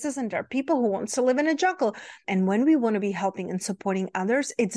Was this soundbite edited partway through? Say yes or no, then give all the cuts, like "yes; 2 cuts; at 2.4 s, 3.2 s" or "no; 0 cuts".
yes; 1 cut; at 2.2 s